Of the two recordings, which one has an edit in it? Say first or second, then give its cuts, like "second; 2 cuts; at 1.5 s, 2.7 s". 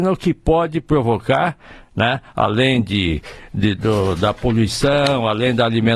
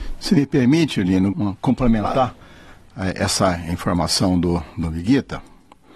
second; 1 cut; at 1.3 s